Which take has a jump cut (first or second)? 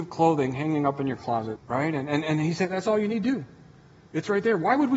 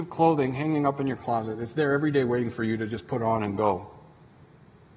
first